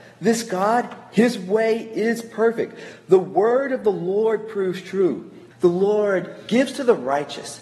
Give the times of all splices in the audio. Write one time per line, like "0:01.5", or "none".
0:05.5